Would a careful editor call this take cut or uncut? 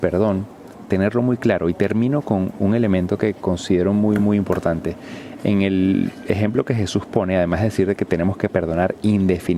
uncut